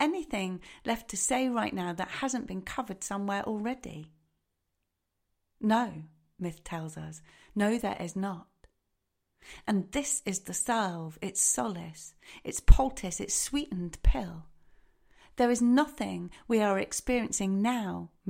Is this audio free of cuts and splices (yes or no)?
yes